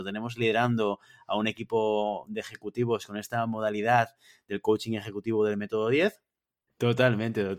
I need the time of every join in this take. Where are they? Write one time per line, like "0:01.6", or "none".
0:06.7